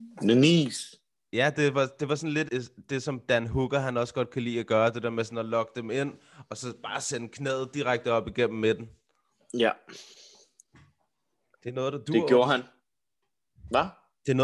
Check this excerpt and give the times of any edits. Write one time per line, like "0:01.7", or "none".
0:02.5